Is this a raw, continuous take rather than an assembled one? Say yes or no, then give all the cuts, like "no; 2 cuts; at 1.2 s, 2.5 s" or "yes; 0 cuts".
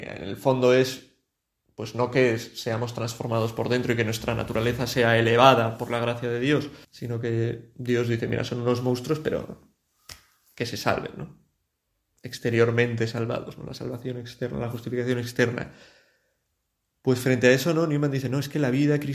no; 1 cut; at 6.8 s